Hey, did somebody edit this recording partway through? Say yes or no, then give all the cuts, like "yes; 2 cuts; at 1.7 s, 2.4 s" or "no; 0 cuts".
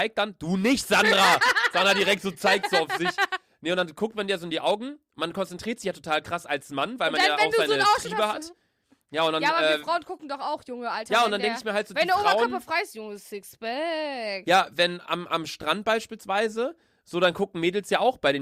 no; 0 cuts